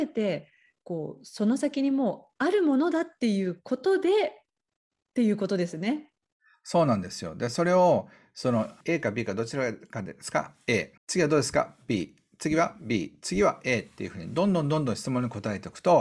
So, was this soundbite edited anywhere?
yes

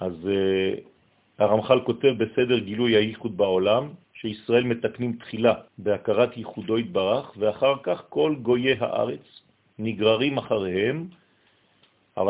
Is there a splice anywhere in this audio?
yes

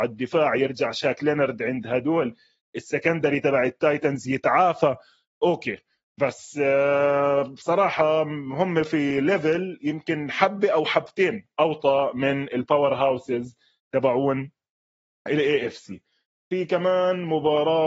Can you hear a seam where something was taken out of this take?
no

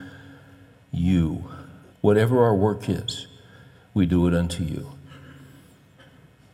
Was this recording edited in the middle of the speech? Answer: yes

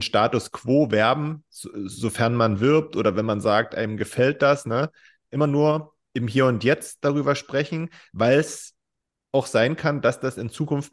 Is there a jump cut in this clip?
no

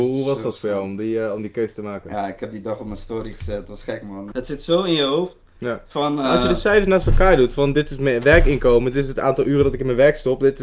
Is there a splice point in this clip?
yes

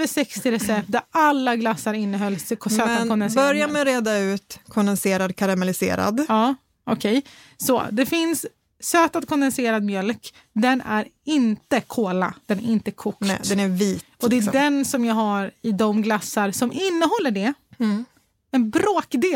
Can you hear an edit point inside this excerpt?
no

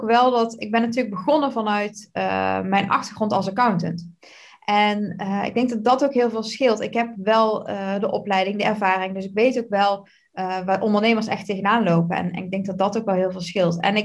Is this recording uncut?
yes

